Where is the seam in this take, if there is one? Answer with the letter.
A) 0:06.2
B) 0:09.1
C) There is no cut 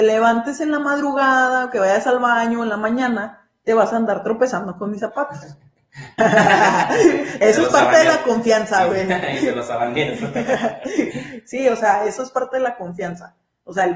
A